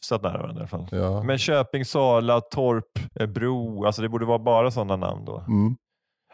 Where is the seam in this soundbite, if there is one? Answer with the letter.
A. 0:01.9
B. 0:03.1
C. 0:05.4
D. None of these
B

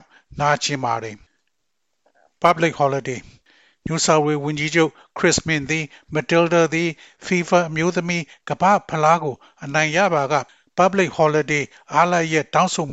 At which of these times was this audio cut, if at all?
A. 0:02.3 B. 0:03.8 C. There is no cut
C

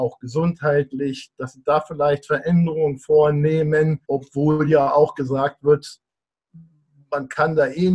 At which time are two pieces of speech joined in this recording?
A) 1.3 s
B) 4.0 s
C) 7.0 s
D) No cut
B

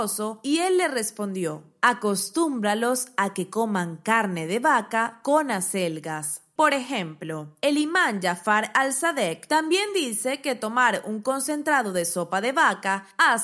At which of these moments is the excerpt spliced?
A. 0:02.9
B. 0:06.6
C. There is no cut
B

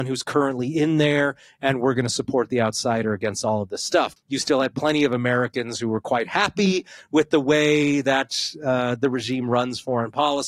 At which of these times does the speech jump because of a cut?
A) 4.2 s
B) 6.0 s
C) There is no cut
A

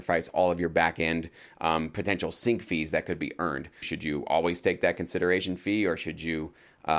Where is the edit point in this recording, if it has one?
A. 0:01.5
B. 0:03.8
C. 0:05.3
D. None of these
B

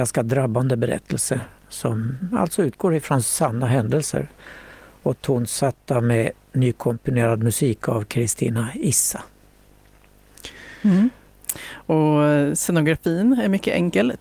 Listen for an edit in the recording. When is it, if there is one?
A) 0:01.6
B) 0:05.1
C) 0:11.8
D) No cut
A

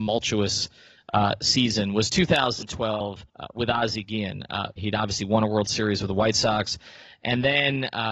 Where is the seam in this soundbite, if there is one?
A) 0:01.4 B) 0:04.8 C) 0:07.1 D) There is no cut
B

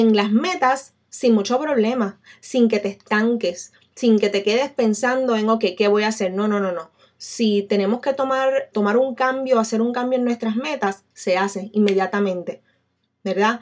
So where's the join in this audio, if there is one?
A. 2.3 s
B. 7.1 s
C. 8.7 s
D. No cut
C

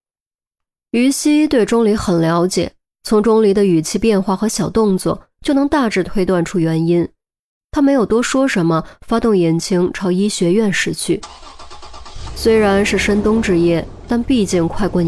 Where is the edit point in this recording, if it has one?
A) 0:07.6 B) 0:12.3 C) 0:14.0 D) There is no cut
D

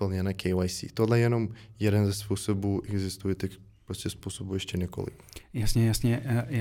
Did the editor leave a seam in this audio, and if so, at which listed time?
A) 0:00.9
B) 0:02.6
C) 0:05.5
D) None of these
D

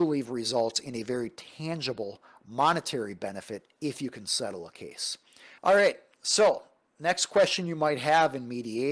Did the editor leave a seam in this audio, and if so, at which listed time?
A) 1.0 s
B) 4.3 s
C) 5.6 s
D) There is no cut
C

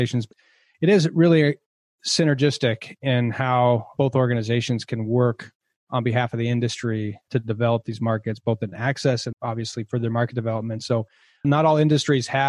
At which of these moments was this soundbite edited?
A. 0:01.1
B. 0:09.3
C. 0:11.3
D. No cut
B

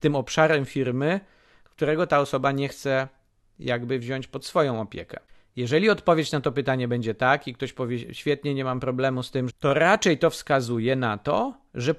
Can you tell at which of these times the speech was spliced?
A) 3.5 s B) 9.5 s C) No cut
B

